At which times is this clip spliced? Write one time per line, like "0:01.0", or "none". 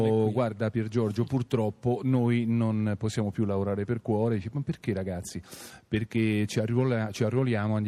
none